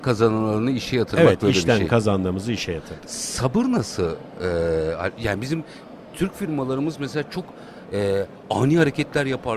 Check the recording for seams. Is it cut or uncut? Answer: uncut